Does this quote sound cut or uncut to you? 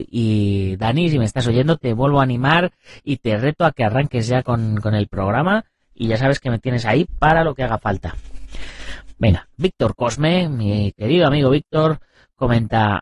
uncut